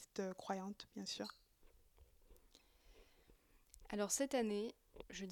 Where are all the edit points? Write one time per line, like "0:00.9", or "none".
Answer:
none